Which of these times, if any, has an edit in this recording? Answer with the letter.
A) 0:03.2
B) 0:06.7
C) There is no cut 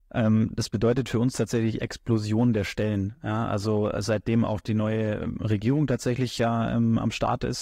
C